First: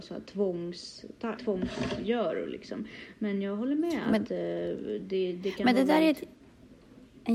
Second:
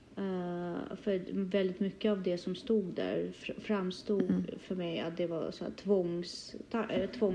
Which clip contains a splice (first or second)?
first